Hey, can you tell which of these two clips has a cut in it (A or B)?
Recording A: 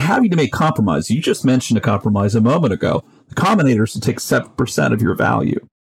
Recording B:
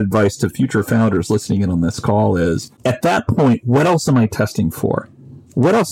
B